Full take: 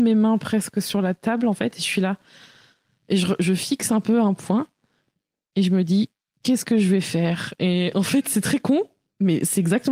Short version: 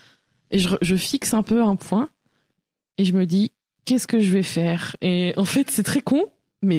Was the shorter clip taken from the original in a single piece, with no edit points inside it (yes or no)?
yes